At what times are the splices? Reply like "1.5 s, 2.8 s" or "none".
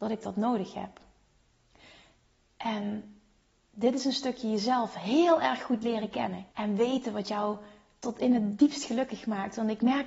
6.5 s